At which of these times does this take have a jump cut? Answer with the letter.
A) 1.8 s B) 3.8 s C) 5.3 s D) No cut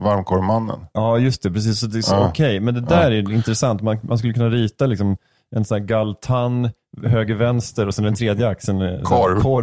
D